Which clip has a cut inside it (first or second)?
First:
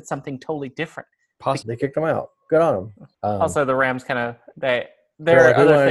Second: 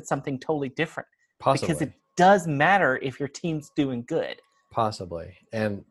first